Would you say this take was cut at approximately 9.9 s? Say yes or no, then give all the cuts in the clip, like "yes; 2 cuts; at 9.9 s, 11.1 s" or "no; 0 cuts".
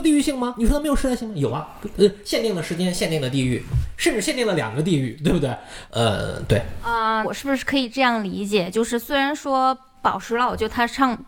no; 2 cuts; at 5.9 s, 7.2 s